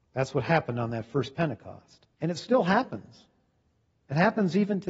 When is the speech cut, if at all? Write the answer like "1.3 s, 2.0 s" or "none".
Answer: 2.1 s